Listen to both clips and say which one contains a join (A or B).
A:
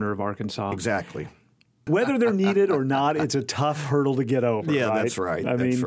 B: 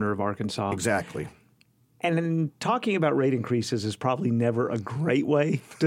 A